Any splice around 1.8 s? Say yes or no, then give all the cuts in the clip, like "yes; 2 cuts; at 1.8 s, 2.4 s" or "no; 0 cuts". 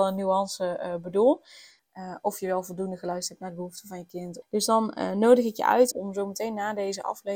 yes; 3 cuts; at 1.8 s, 4.4 s, 5.9 s